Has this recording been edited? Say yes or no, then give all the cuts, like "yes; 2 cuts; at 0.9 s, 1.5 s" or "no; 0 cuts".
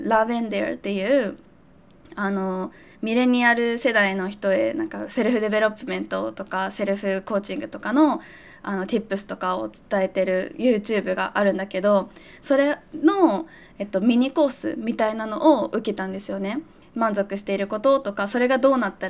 yes; 1 cut; at 16.8 s